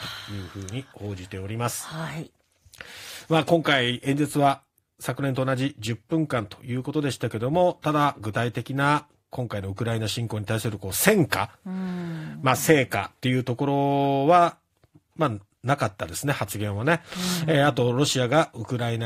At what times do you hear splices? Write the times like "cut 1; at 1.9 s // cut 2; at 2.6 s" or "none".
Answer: none

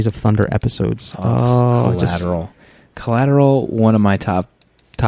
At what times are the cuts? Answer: none

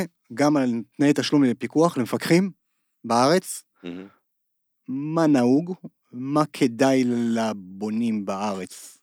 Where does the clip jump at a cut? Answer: none

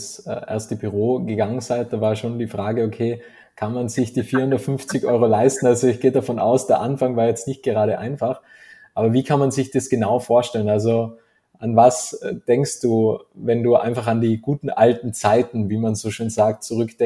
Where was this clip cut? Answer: none

